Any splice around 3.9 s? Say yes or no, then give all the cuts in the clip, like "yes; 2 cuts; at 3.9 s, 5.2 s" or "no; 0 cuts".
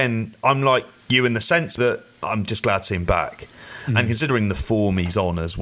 no; 1 cut; at 1.8 s